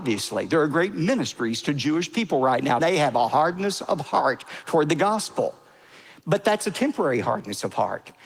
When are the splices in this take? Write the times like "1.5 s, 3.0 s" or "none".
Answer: 2.8 s